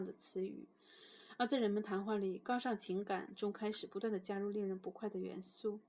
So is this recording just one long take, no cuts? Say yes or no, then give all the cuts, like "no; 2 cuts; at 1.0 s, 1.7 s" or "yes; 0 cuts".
yes; 0 cuts